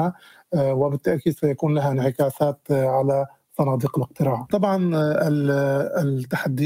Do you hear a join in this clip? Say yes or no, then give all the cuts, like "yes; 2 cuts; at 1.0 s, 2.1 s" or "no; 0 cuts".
yes; 1 cut; at 4.5 s